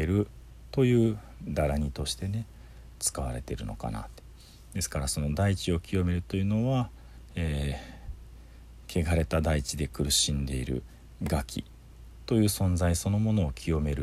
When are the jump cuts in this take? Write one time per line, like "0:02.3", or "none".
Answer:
none